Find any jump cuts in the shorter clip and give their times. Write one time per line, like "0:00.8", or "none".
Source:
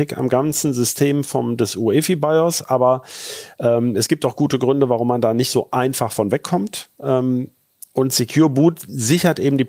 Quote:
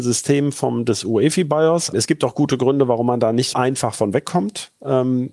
0:01.9
0:03.5